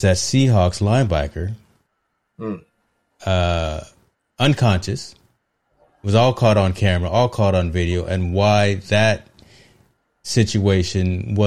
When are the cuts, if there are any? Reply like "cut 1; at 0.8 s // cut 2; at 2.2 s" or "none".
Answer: cut 1; at 3.1 s